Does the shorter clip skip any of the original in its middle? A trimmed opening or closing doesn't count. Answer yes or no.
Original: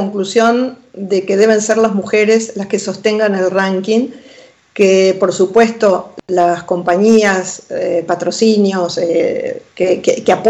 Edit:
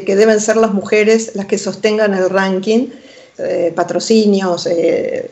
yes